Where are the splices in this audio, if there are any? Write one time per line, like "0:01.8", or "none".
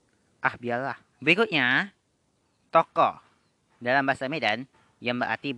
0:01.1